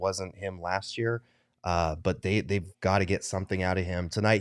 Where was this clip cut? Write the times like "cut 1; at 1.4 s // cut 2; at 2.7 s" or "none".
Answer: none